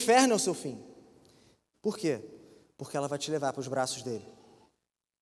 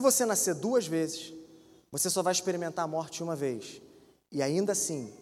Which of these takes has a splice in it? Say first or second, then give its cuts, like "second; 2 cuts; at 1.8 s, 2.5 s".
first; 1 cut; at 1.7 s